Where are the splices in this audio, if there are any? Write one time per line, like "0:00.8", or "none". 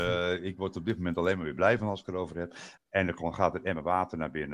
0:02.8